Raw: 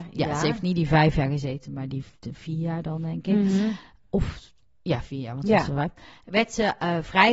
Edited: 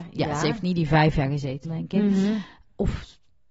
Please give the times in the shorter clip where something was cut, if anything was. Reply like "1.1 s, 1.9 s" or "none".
1.6 s

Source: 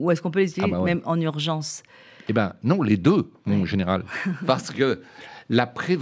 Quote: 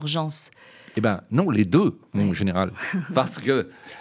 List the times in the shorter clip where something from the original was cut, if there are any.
none

